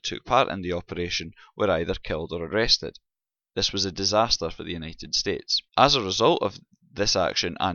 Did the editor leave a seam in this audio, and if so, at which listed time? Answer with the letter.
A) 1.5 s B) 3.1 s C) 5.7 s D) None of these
C